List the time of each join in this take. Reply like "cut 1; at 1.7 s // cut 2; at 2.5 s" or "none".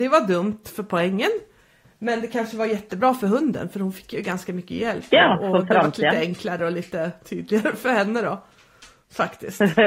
none